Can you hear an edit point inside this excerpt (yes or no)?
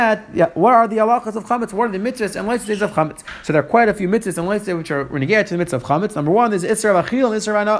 no